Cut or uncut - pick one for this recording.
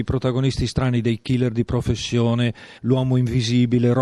cut